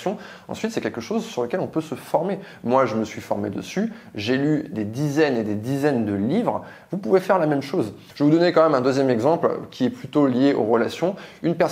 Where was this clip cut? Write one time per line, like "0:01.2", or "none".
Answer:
0:08.1

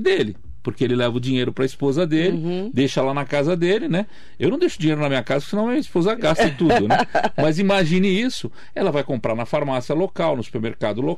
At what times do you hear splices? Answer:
none

